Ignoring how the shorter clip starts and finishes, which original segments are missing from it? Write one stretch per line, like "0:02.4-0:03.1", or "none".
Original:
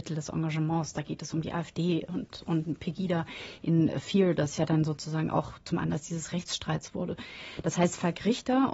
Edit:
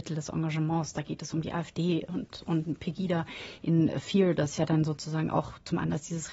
none